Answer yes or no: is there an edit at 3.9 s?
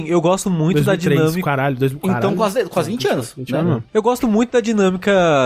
no